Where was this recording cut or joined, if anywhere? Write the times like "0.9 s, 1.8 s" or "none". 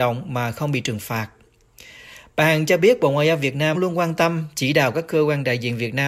3.7 s